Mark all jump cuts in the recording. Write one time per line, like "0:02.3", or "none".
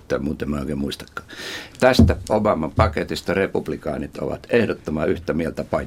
0:01.7